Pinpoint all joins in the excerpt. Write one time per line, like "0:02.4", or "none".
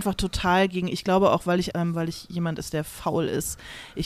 0:01.7